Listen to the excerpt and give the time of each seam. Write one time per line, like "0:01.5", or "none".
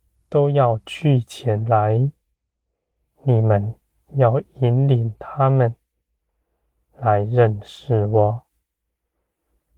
none